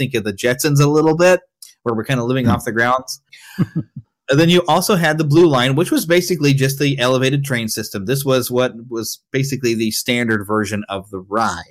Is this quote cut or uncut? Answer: cut